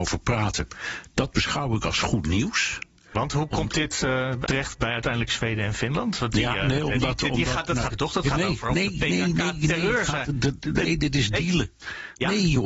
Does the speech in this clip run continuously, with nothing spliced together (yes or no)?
no